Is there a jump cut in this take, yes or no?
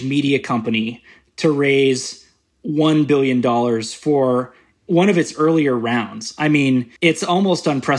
yes